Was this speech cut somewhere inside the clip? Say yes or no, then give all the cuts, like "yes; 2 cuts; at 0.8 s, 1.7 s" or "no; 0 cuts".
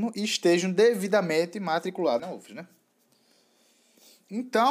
yes; 1 cut; at 2.2 s